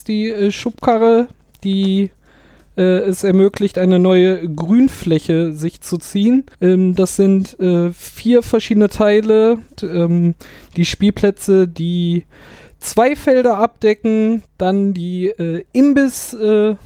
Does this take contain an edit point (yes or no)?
yes